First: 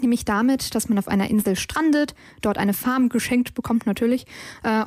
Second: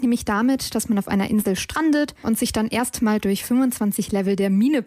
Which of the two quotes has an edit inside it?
second; 1 cut; at 2.2 s

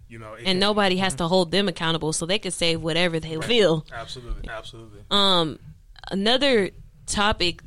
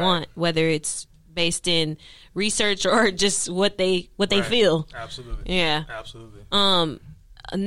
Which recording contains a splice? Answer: first; 2 cuts; at 3.4 s, 4.5 s

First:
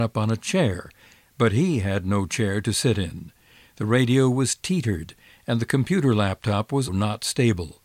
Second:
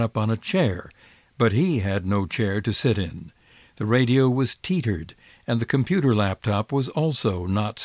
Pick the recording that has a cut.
first; 1 cut; at 6.9 s

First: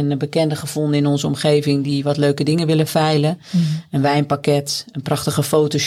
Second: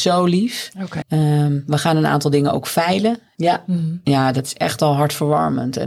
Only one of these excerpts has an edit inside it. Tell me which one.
second; 2 cuts; at 1.0 s, 3.3 s

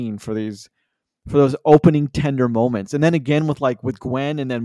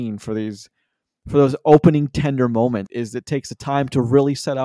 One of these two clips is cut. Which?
second; 1 cut; at 2.9 s

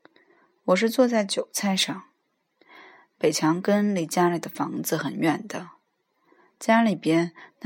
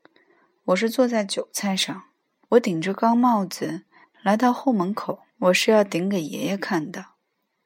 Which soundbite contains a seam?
second; 3 cuts; at 2.4 s, 4.0 s, 5.3 s

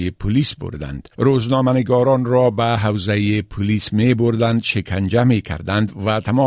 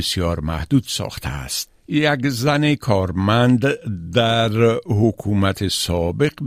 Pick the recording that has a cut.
first; 1 cut; at 1.1 s

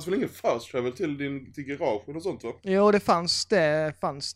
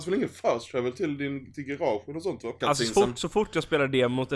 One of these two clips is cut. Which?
second; 1 cut; at 2.6 s

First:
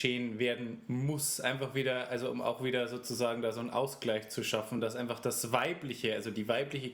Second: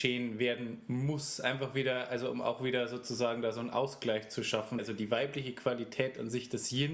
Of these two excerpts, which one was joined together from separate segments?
second; 1 cut; at 4.8 s

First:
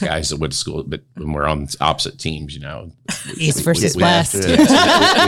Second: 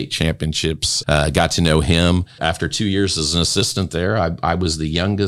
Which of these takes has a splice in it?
second; 2 cuts; at 1.0 s, 2.4 s

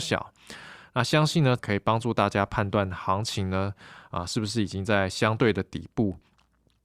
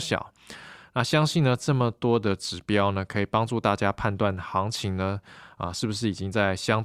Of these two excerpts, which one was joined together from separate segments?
first; 1 cut; at 1.6 s

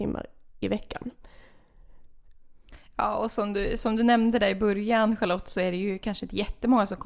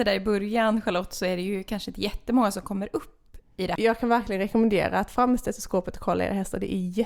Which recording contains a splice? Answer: second; 1 cut; at 3.8 s

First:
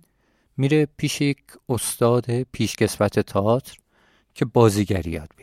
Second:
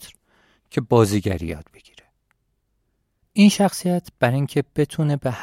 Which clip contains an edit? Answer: second; 1 cut; at 3.2 s

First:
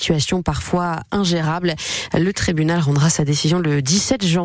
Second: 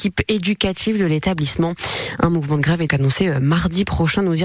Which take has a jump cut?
second; 1 cut; at 2.9 s

